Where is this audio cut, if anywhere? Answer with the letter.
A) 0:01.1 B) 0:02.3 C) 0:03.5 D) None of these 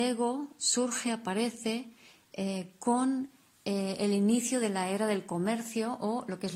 D